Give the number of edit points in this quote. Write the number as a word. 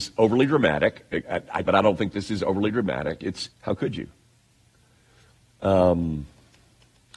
two